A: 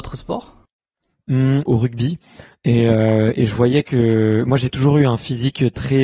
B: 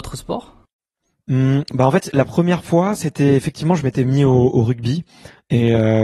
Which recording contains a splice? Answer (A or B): A